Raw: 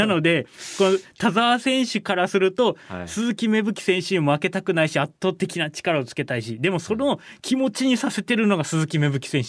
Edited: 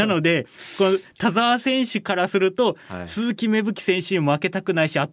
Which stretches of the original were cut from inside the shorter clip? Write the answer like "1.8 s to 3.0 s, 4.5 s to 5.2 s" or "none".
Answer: none